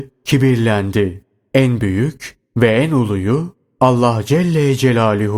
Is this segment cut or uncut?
uncut